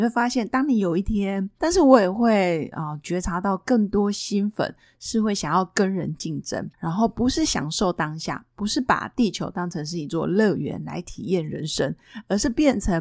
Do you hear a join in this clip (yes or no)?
yes